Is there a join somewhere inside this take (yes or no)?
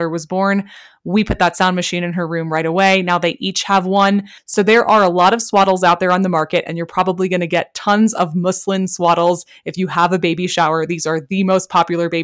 yes